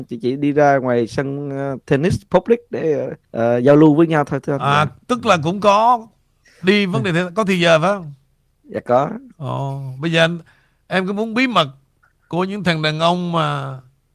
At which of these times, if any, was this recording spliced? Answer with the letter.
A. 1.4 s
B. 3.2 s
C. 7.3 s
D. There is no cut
B